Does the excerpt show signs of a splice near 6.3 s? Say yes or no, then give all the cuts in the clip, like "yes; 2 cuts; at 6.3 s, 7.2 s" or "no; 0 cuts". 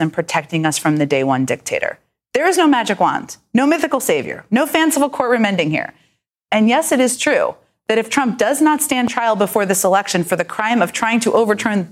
no; 0 cuts